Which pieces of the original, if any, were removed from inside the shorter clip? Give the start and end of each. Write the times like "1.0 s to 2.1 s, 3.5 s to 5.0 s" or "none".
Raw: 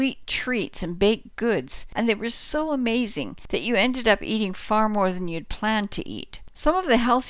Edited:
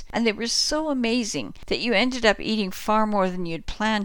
none